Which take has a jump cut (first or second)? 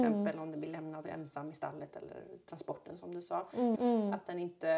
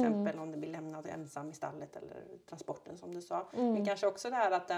first